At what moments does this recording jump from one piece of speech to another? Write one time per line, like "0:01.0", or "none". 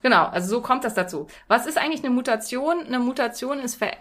none